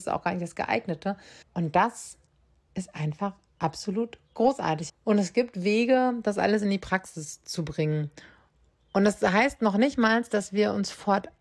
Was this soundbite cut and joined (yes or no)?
yes